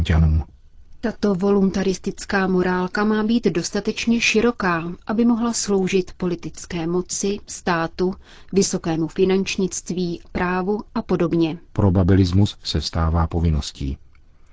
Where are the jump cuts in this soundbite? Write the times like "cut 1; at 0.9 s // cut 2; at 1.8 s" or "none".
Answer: cut 1; at 11.7 s